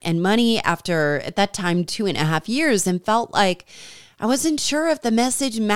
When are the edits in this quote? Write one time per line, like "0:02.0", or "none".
none